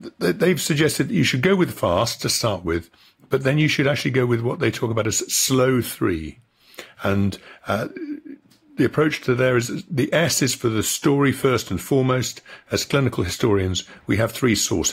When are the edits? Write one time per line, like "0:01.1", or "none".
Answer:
none